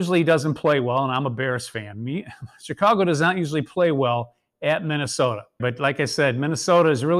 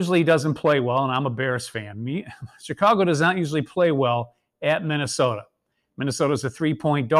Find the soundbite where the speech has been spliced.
first; 1 cut; at 5.6 s

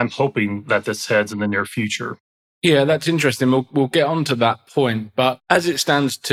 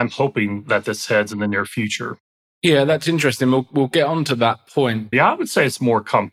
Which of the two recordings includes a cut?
second; 1 cut; at 5.1 s

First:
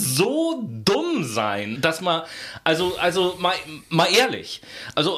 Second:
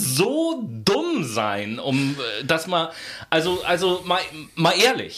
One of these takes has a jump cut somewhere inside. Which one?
first; 1 cut; at 1.8 s

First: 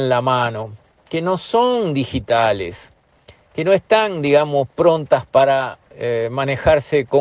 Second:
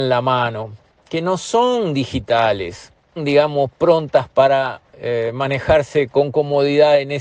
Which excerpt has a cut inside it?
second; 1 cut; at 3.2 s

